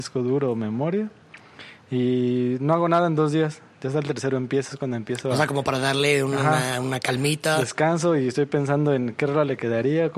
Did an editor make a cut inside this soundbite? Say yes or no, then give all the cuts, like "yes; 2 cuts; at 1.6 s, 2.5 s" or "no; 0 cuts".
no; 0 cuts